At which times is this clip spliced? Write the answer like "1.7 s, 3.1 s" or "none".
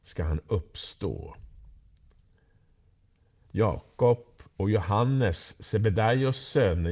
none